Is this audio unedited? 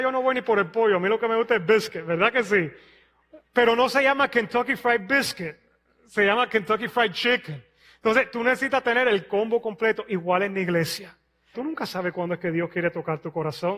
no; 1 cut; at 11.5 s

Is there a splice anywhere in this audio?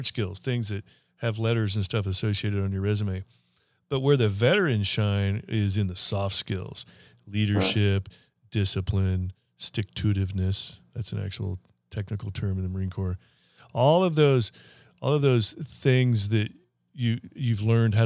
no; 0 cuts

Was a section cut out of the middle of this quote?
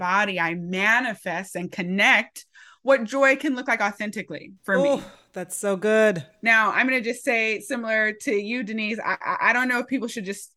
no; 0 cuts

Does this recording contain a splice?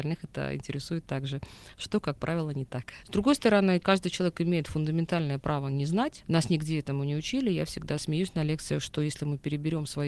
yes; 1 cut; at 3.0 s

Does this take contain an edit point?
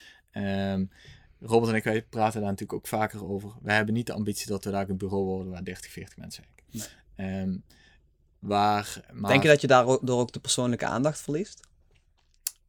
no; 0 cuts

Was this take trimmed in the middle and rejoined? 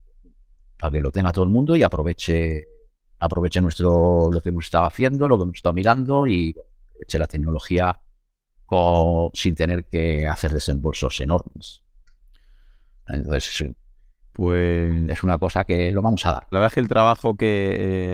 yes; 1 cut; at 16.5 s

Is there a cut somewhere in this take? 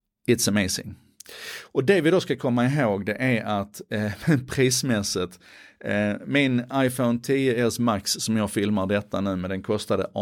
no; 0 cuts

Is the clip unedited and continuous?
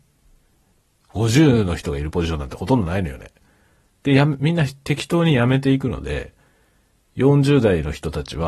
no; 2 cuts; at 1.0 s, 3.9 s

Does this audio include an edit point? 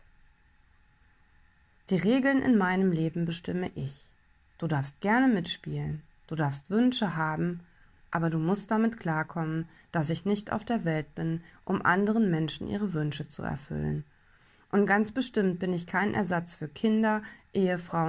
no; 0 cuts

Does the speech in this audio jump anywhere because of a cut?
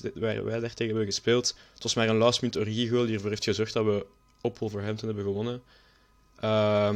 no; 0 cuts

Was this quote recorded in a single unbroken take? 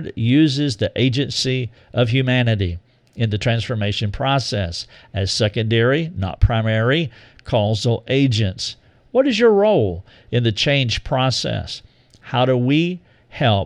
yes; 0 cuts

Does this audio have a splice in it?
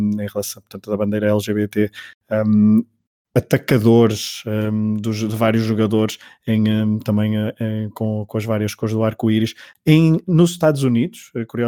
no; 0 cuts

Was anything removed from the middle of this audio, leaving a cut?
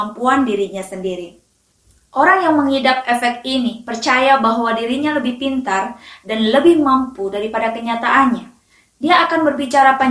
no; 0 cuts

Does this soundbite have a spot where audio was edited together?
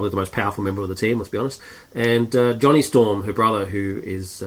no; 0 cuts

